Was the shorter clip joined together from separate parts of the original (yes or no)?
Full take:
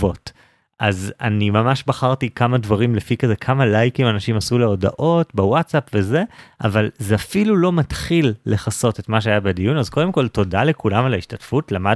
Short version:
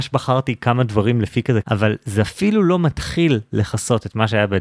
yes